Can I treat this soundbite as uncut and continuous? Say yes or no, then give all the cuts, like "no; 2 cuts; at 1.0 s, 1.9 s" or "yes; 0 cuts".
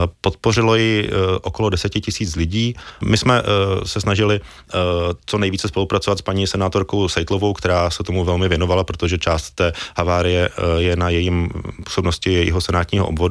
no; 1 cut; at 3.0 s